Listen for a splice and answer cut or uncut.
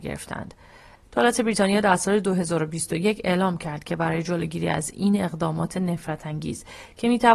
cut